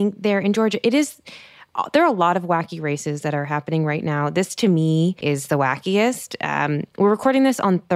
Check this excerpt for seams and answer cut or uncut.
cut